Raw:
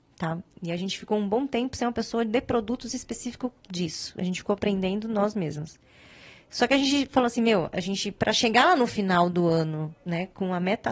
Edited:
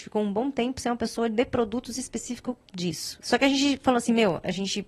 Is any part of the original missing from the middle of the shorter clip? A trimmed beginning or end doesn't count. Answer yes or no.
yes